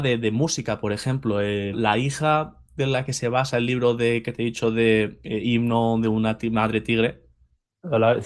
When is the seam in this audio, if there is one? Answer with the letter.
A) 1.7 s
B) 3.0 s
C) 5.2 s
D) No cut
A